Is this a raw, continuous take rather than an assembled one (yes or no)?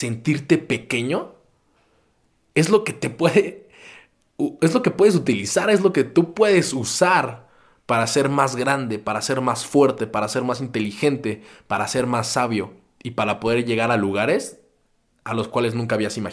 yes